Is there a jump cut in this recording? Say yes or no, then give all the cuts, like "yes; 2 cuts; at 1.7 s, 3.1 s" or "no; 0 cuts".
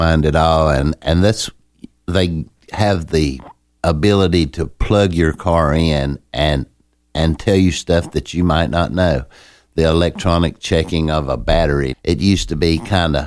yes; 1 cut; at 11.9 s